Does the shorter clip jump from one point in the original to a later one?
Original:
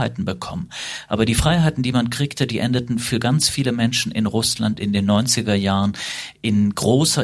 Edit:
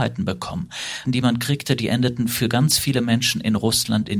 yes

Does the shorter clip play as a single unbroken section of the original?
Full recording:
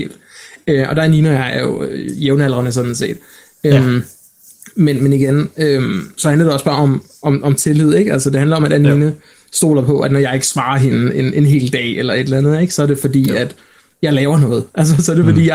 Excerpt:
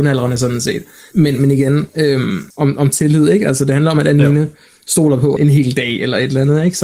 no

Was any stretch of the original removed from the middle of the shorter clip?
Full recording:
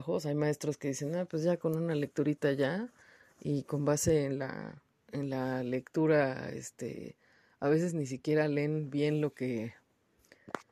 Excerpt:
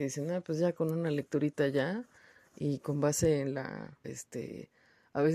yes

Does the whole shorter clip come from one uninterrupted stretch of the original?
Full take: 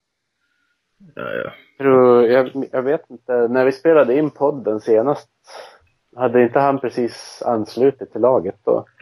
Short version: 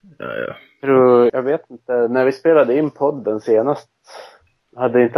no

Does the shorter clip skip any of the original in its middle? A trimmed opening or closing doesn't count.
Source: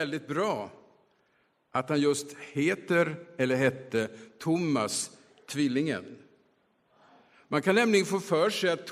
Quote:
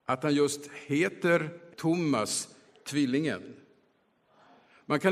yes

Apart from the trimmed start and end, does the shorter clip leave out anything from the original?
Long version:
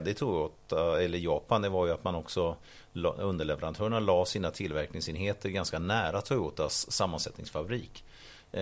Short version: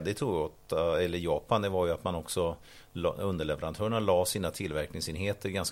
no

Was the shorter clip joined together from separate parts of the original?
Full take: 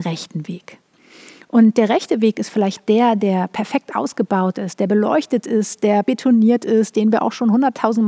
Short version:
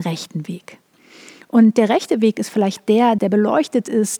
yes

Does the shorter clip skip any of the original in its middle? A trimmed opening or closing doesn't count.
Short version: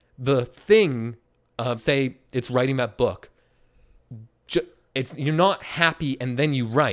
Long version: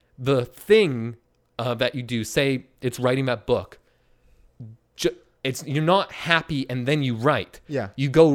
yes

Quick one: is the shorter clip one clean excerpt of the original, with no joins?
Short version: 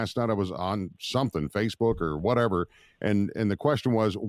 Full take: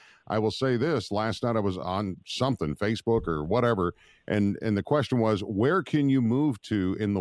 yes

